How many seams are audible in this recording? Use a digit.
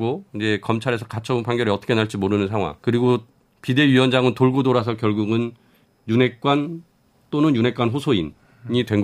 1